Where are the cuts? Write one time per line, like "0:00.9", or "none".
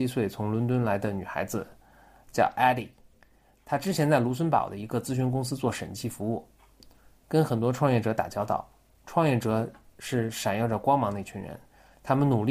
0:07.2